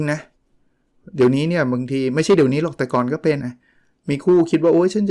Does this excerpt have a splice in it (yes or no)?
yes